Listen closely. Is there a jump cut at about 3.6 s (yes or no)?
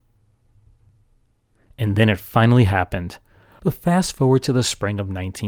yes